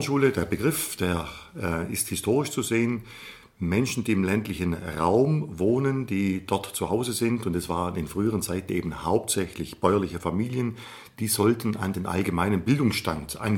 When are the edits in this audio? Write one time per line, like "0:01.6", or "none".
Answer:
none